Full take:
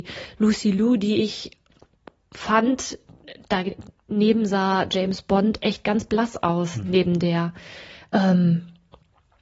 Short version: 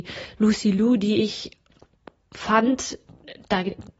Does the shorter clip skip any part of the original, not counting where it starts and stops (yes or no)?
no